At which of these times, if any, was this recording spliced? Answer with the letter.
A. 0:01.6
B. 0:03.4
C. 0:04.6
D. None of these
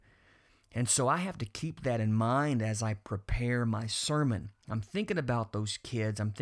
D